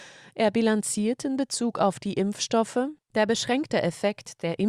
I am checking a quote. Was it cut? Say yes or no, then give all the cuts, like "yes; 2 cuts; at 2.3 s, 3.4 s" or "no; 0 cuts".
yes; 1 cut; at 3.0 s